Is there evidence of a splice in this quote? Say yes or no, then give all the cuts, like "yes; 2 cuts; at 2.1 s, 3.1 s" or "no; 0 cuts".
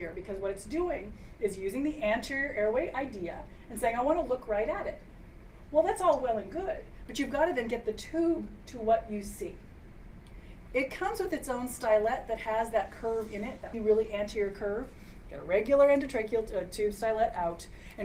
yes; 2 cuts; at 13.7 s, 15.2 s